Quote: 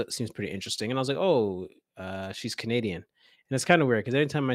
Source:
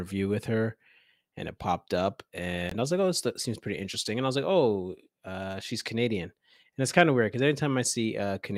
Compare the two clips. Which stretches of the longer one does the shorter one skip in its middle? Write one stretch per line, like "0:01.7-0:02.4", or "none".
none